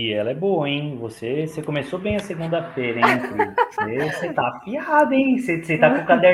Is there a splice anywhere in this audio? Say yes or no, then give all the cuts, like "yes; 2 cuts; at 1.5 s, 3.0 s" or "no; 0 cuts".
no; 0 cuts